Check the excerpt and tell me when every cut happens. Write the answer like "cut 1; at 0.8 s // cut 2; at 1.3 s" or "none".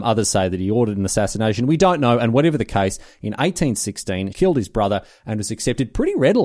cut 1; at 4.3 s